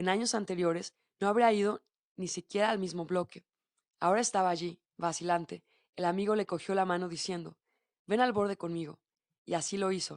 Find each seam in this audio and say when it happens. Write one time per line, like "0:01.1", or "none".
none